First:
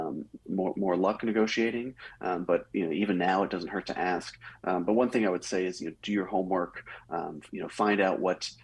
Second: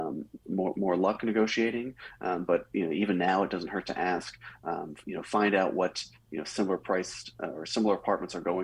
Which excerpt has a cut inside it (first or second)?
second